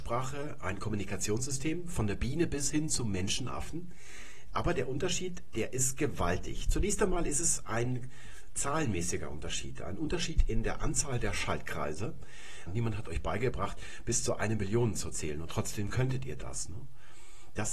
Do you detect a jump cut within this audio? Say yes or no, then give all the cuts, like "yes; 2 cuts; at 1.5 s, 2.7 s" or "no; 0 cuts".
yes; 1 cut; at 12.7 s